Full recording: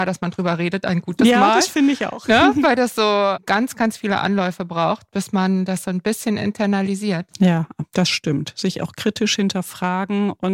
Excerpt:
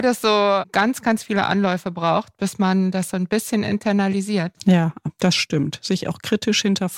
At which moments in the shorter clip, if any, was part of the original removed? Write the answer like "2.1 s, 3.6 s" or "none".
none